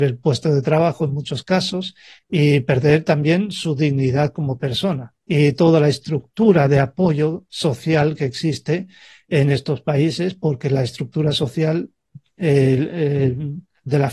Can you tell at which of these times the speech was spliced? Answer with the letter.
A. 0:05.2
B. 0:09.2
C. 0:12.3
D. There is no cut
A